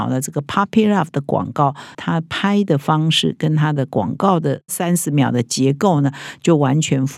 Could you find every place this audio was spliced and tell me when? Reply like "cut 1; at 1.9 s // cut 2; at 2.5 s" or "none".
cut 1; at 1.9 s

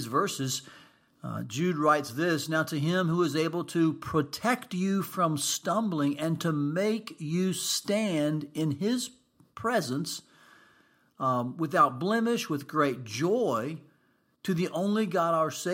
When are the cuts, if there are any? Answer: none

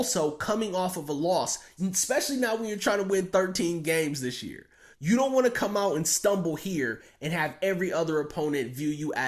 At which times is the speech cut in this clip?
cut 1; at 1.8 s // cut 2; at 4.9 s

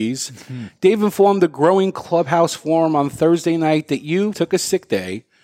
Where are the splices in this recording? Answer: cut 1; at 4.3 s

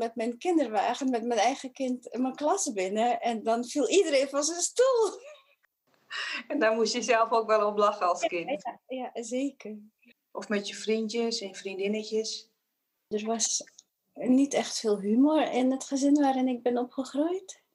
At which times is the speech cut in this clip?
cut 1; at 10.1 s // cut 2; at 13.1 s

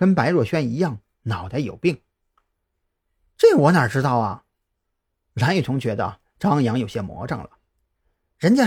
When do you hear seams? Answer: none

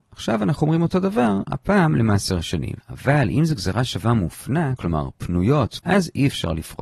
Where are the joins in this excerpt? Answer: cut 1; at 2.8 s // cut 2; at 4.8 s // cut 3; at 5.8 s

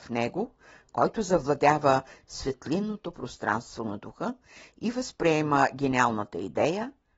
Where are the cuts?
none

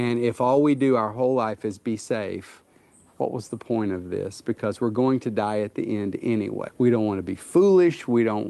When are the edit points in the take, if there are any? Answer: cut 1; at 6.7 s

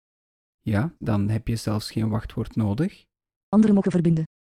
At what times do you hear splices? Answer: cut 1; at 1.0 s

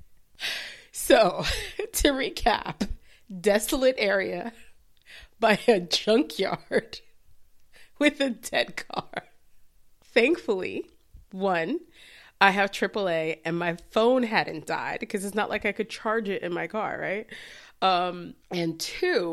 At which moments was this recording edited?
cut 1; at 18.4 s

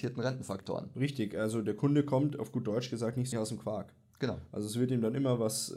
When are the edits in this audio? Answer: cut 1; at 3.3 s

